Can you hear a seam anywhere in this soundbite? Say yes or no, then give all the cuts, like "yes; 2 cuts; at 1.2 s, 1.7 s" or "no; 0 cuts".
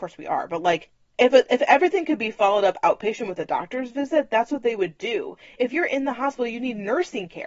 no; 0 cuts